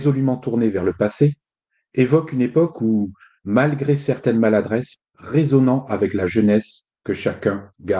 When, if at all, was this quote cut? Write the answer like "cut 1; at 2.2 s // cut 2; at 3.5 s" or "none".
cut 1; at 4.9 s